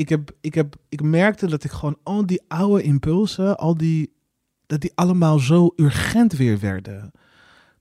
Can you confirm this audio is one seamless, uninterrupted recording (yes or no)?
yes